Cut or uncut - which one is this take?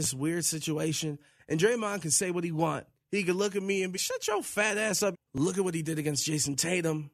cut